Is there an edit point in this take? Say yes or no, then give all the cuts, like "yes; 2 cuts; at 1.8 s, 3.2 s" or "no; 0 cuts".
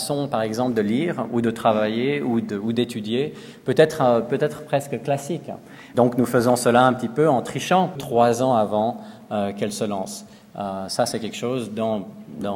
yes; 2 cuts; at 5.9 s, 8.0 s